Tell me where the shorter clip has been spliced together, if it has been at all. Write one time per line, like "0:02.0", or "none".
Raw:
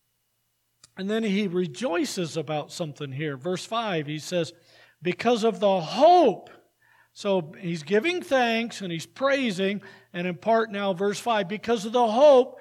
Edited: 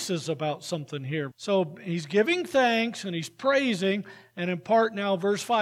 0:01.3

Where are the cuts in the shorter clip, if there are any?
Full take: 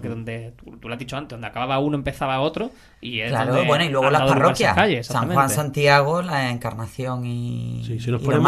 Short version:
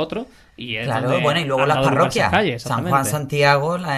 none

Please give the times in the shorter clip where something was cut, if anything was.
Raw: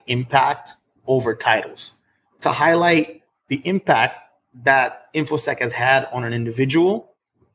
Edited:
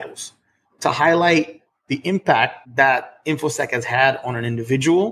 0:02.6

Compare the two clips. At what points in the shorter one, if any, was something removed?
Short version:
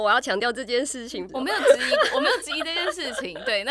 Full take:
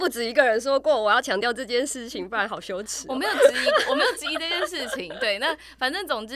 0:01.3

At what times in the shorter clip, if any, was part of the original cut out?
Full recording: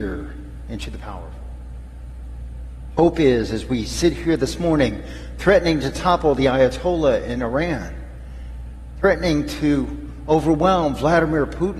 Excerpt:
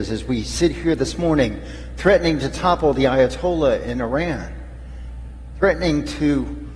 none

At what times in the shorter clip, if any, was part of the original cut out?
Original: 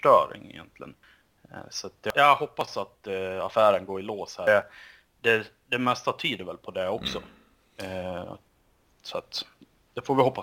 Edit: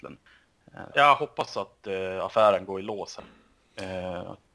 0:00.9
0:03.2

